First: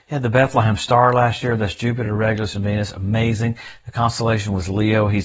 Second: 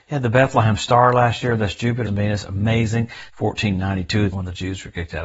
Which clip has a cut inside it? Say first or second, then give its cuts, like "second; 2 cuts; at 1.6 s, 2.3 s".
second; 3 cuts; at 2.1 s, 3.3 s, 4.3 s